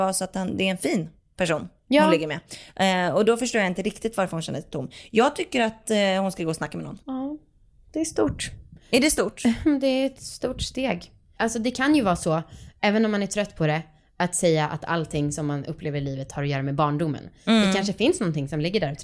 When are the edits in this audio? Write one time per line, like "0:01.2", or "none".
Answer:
0:07.0
0:11.4